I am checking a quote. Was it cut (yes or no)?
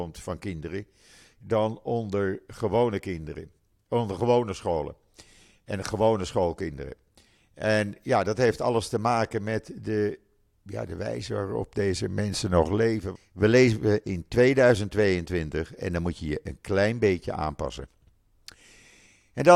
yes